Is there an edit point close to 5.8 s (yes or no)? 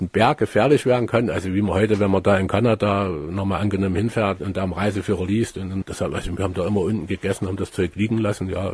yes